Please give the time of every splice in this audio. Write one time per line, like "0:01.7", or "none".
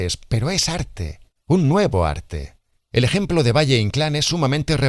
0:02.8

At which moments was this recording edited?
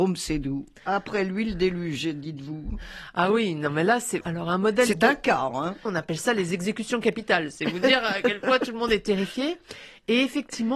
0:04.2
0:05.9

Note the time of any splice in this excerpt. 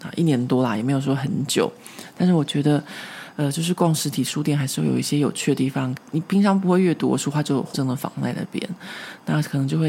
0:06.0
0:07.7

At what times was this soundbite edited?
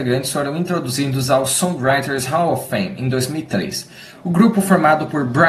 0:04.1

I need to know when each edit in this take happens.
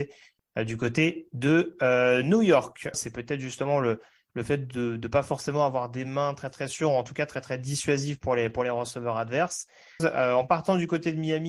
0:02.9
0:10.0

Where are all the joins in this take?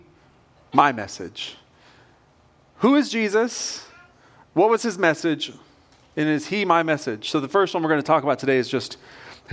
none

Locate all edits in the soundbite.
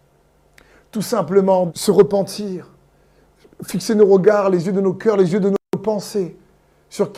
0:01.7

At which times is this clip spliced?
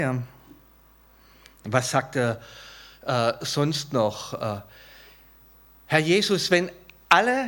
none

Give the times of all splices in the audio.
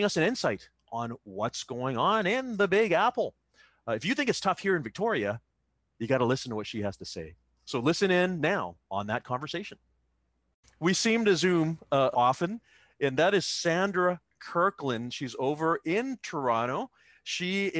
0:08.8
0:12.1

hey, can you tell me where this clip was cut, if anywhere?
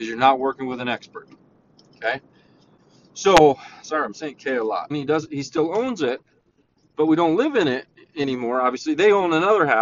0:04.9

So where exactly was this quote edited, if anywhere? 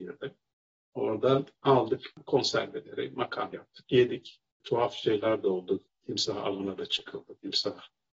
0:03.5

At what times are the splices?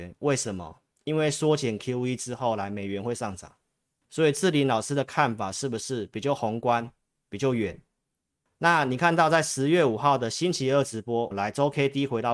0:04.0
0:08.5
0:11.3

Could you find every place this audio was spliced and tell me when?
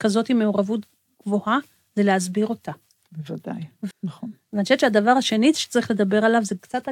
0:03.9

